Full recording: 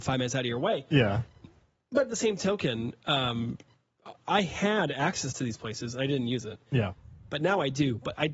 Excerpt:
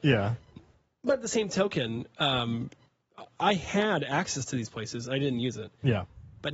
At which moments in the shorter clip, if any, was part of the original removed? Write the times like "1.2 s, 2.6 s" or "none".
none